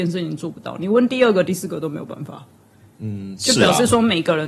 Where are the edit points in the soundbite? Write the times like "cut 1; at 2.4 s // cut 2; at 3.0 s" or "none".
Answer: cut 1; at 1.5 s